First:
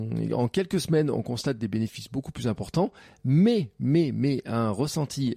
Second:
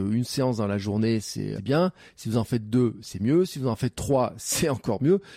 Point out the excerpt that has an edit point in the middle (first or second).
second